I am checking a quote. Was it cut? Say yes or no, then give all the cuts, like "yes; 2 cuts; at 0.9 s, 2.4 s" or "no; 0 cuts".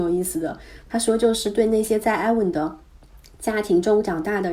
no; 0 cuts